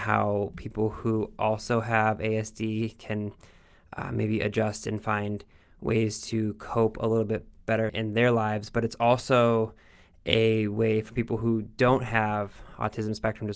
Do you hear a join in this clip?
yes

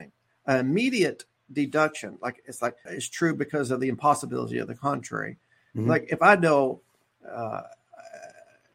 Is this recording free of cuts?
no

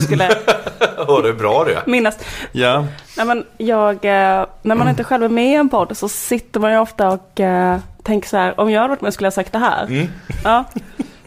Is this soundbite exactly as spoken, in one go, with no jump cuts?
yes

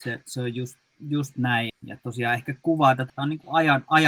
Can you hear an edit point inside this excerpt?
yes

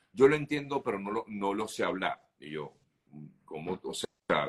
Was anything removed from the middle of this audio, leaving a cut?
no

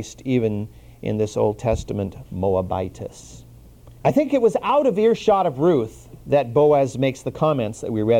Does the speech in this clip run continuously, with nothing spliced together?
no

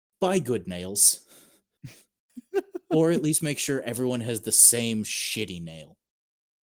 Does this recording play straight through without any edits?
yes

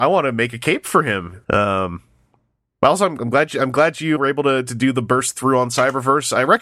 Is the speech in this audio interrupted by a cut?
yes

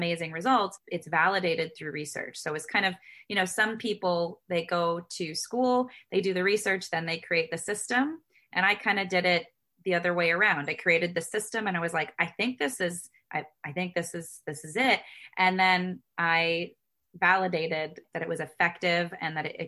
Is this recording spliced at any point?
no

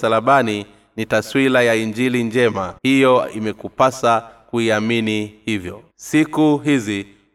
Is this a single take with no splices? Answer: no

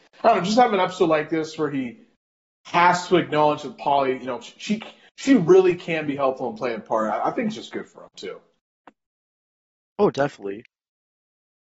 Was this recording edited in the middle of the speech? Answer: no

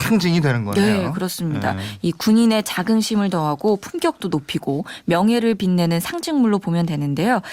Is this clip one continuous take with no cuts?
yes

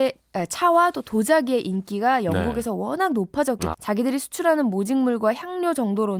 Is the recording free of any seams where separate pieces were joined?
no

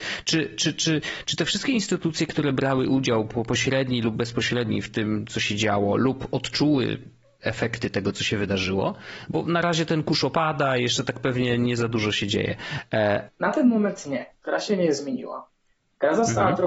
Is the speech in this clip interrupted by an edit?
yes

